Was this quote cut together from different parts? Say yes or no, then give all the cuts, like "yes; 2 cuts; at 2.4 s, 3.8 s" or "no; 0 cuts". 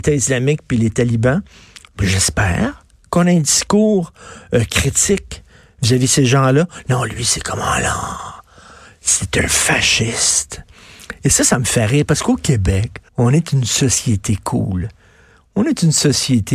yes; 1 cut; at 13.1 s